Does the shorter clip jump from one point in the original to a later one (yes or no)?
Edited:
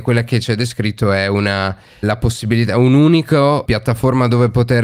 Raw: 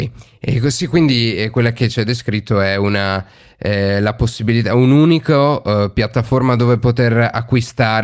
yes